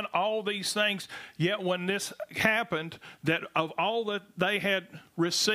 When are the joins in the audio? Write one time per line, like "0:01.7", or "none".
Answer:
none

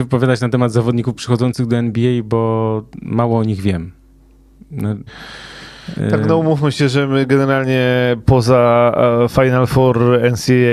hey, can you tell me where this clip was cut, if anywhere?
0:05.1

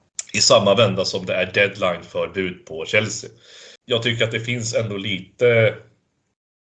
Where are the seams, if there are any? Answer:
0:03.8

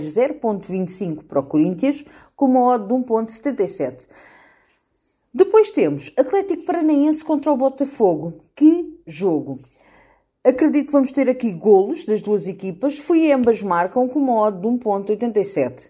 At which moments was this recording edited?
none

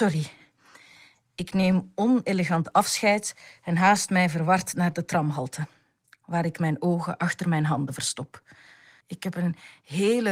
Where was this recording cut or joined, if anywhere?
0:09.0

